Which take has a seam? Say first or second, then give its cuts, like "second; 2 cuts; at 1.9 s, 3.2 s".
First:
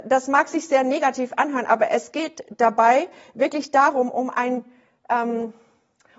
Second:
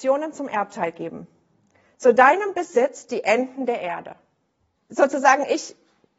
second; 1 cut; at 4.8 s